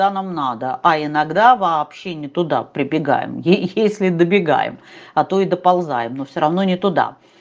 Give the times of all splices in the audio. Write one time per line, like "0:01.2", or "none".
none